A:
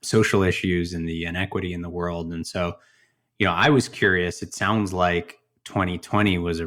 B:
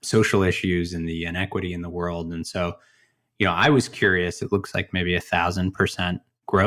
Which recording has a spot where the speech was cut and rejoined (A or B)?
B